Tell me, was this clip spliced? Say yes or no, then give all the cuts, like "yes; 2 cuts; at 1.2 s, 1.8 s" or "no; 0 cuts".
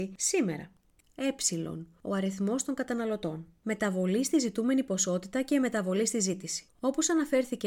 yes; 1 cut; at 3.6 s